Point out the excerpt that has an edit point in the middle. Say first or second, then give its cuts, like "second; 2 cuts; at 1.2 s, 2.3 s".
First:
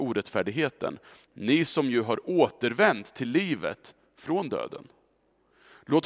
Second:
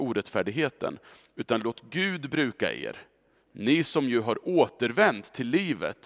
first; 1 cut; at 1.2 s